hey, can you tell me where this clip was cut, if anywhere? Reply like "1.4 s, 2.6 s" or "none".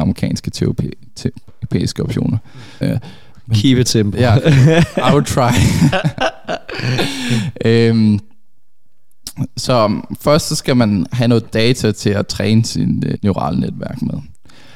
2.8 s, 13.2 s